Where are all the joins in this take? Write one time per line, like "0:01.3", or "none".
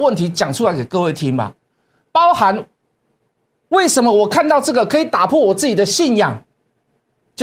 none

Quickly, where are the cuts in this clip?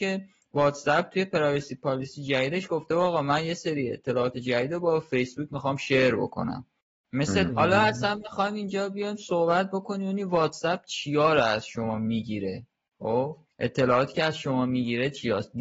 0:07.5
0:13.5

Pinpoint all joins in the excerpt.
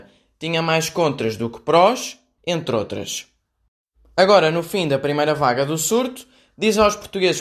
0:02.4

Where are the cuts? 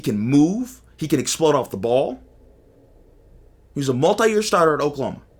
none

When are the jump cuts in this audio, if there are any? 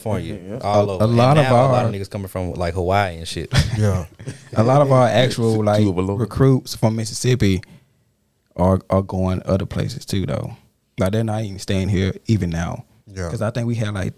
none

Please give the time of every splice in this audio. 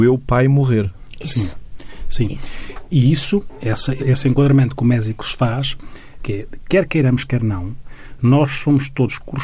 0:04.0
0:06.2

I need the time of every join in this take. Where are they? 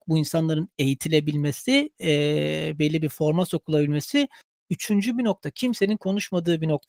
none

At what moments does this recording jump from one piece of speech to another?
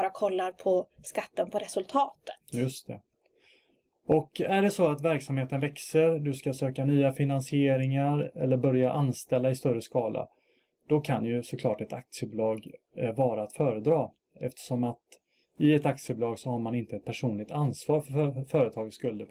none

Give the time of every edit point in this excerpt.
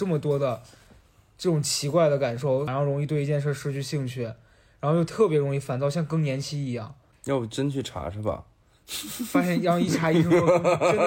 0:02.7

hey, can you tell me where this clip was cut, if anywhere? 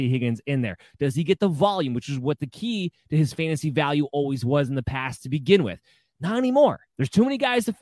0:06.9

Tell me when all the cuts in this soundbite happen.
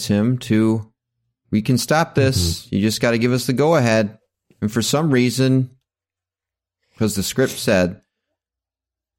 0:01.4

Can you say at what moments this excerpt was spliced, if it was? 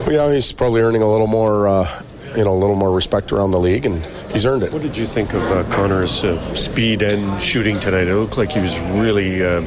0:04.7

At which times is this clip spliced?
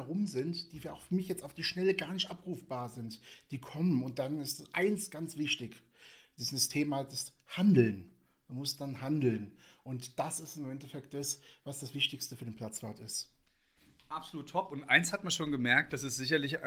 none

